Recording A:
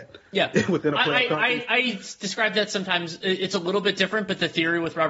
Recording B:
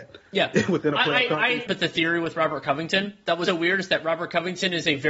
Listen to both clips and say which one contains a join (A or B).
B